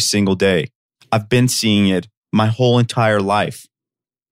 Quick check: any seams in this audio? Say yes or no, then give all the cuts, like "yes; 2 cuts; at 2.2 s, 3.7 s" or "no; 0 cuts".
yes; 1 cut; at 1.0 s